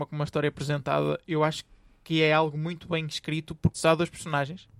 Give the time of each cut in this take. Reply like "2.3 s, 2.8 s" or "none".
3.7 s